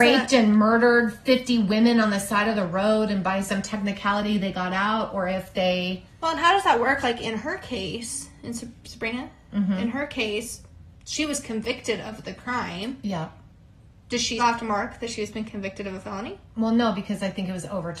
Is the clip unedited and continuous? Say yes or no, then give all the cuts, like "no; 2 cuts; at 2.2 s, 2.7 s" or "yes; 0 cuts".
no; 1 cut; at 14.4 s